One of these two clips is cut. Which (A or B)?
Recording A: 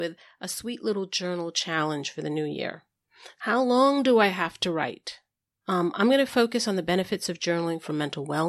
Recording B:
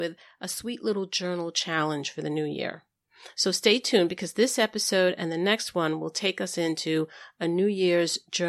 A